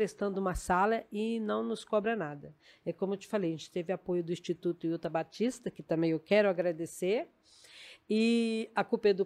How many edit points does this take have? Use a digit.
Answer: 0